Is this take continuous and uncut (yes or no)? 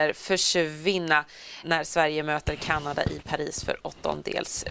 no